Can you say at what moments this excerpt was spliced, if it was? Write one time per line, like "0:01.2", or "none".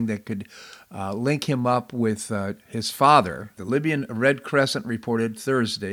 0:03.6